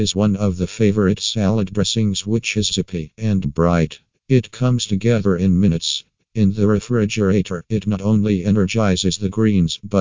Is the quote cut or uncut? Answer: cut